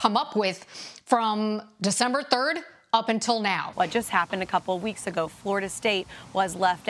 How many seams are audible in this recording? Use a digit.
1